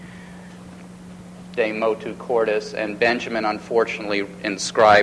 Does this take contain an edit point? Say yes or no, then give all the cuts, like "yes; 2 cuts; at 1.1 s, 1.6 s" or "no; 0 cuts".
yes; 1 cut; at 1.5 s